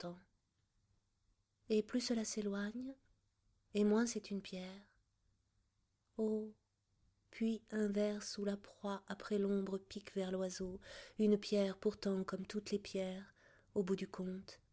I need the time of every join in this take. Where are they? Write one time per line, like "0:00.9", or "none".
none

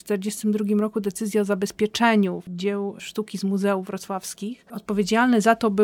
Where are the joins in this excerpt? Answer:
none

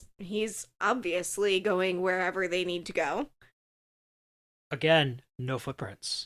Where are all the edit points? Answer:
0:04.5

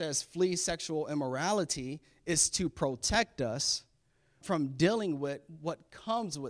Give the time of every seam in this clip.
0:04.4

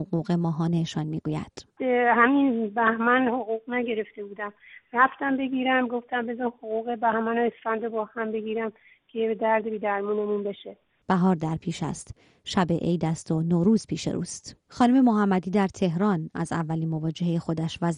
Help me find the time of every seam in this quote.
0:11.0

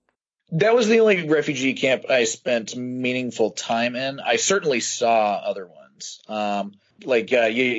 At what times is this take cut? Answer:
none

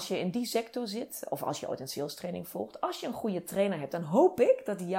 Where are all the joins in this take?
none

